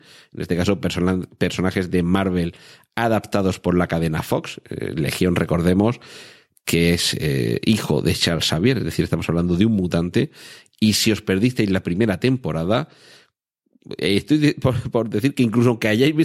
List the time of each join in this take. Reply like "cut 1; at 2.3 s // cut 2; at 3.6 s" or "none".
none

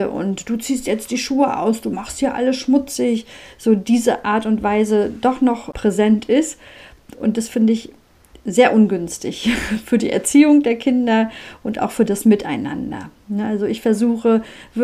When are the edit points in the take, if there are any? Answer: none

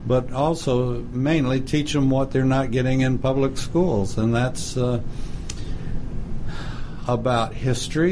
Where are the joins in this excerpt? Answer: none

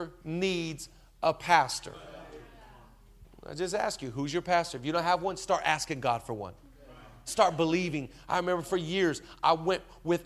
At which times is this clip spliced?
none

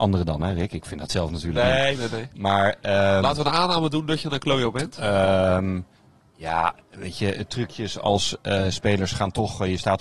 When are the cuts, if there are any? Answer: none

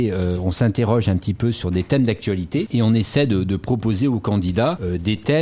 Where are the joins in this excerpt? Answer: none

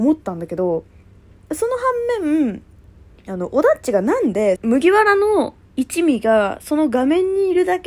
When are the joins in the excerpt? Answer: cut 1; at 4.6 s

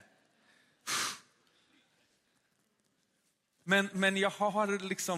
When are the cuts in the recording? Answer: cut 1; at 3.9 s

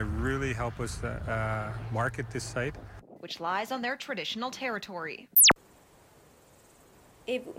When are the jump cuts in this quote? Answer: none

